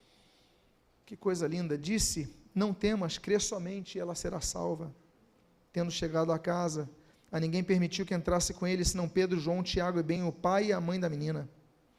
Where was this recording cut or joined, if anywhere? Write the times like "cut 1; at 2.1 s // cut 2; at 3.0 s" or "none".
cut 1; at 10.2 s